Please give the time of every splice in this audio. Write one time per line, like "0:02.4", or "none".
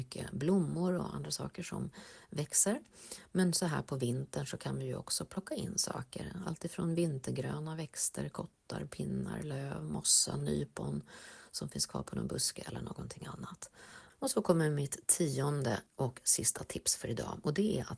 0:14.1
0:15.9